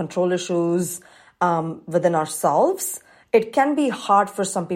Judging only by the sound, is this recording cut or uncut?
uncut